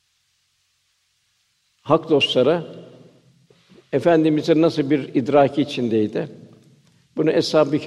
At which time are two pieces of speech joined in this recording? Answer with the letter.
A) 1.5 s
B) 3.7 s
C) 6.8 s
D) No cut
D